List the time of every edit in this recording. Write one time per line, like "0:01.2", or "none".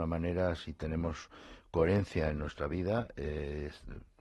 none